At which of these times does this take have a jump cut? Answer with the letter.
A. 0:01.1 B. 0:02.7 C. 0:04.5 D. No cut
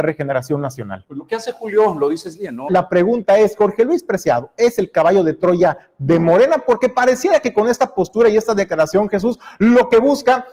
B